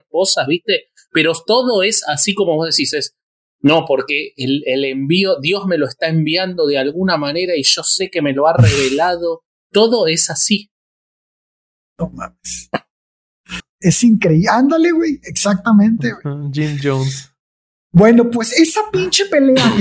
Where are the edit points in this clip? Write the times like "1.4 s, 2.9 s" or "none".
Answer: 13.6 s